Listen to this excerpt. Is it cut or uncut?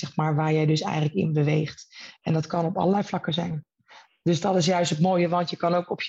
uncut